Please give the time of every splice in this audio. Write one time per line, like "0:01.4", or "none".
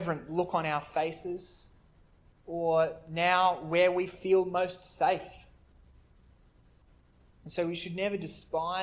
0:07.3